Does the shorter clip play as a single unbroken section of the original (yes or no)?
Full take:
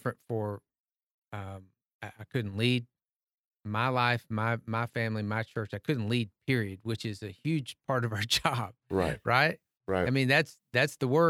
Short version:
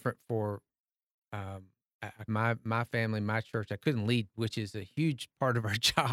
no